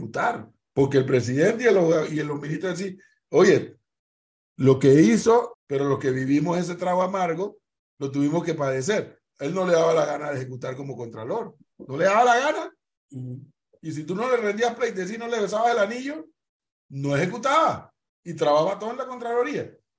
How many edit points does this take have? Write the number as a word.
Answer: one